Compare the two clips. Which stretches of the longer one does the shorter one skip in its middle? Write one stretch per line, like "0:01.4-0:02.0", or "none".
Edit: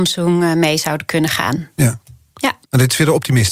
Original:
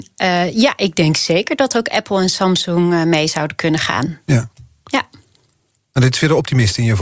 0:05.1-0:05.8